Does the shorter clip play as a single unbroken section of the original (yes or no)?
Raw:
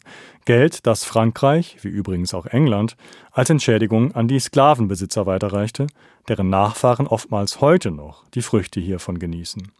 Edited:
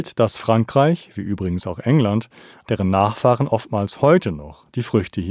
no